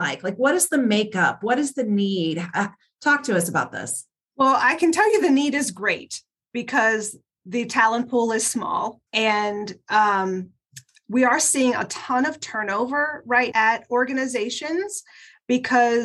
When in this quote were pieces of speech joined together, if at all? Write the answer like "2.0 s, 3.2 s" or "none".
9.1 s, 13.5 s